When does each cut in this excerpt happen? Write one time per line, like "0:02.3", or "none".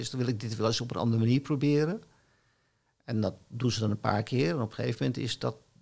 none

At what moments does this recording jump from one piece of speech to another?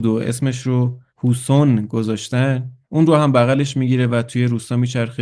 0:01.1
0:02.8

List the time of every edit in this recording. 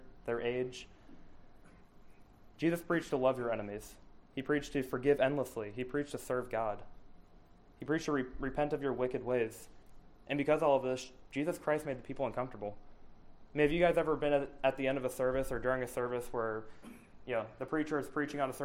none

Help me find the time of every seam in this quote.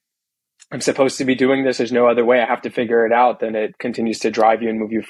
none

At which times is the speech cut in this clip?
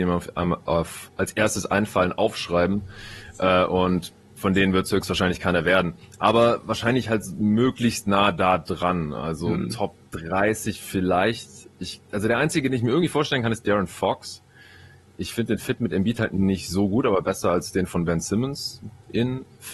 none

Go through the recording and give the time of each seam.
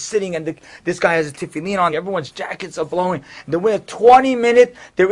0:01.9

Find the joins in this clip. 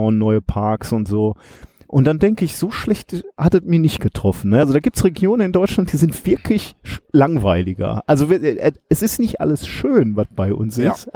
none

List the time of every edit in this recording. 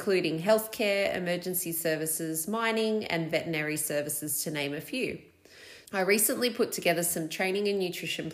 0:05.9

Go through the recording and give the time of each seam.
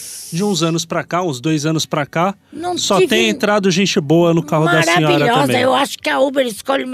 none

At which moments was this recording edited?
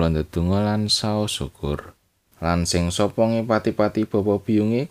0:02.3

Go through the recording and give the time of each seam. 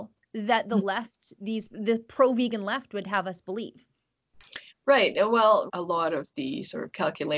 0:05.7

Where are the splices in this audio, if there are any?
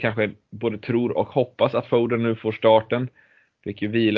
none

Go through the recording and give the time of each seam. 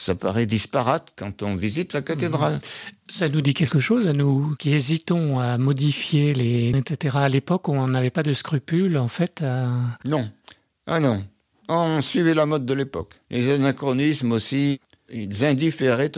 0:06.7

